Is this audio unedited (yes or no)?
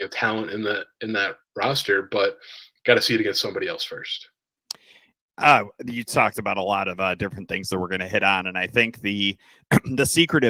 yes